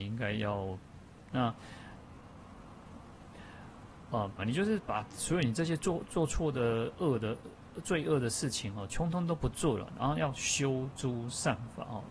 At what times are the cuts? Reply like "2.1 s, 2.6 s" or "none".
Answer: 1.3 s, 4.4 s